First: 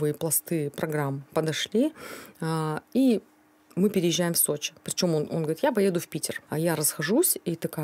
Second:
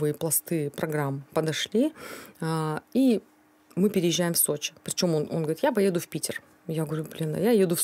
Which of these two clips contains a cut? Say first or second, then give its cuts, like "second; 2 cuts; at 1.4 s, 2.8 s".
first; 1 cut; at 6.5 s